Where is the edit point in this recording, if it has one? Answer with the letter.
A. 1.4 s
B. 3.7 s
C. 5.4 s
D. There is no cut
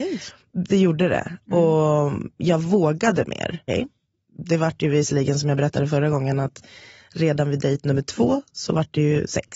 B